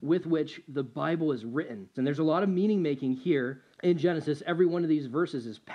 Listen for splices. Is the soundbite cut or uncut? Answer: cut